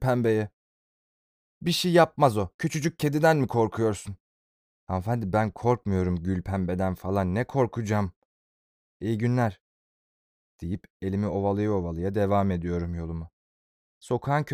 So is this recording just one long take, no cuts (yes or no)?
yes